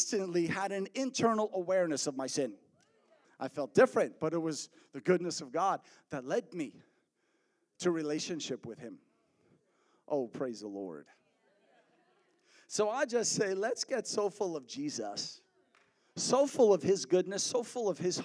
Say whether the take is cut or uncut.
cut